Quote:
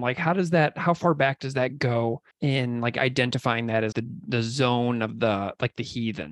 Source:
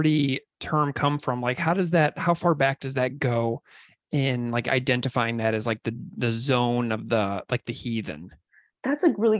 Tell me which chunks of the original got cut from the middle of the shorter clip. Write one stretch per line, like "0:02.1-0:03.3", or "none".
0:03.7-0:04.0
0:05.6-0:05.8